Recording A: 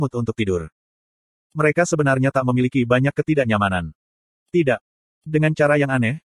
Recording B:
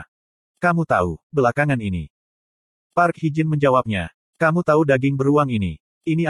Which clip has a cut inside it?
B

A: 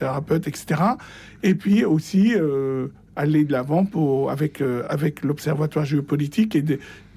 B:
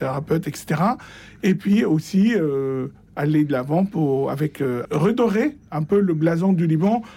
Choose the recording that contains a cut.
B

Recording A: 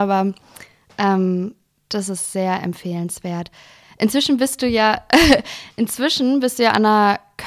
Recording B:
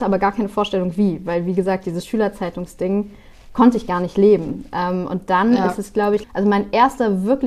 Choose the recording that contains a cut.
B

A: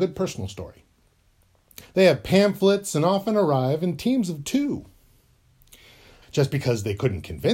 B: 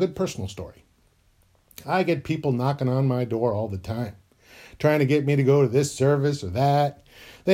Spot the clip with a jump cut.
A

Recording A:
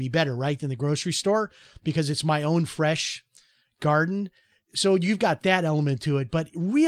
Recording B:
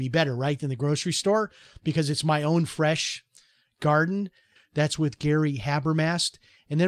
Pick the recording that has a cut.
B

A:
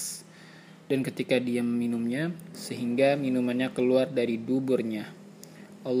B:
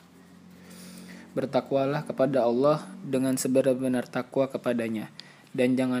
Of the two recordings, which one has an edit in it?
A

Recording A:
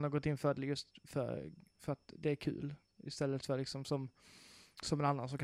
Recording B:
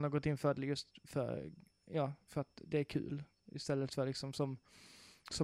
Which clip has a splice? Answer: A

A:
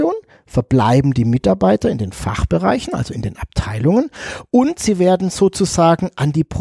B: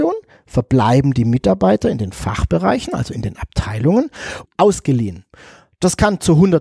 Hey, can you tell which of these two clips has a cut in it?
B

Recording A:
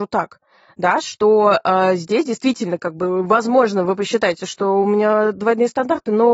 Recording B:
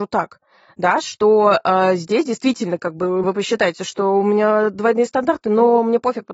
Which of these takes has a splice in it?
B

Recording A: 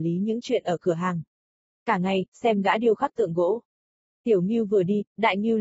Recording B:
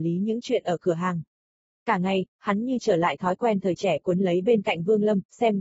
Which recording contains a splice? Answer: A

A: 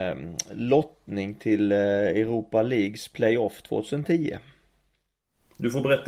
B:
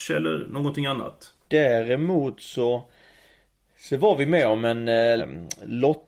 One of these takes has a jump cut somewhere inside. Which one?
B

